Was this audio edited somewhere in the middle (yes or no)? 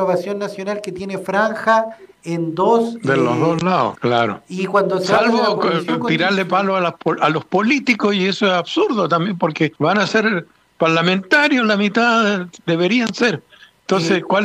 yes